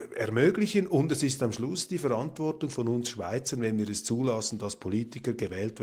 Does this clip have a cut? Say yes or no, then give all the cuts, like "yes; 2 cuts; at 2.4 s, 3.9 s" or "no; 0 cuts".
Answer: no; 0 cuts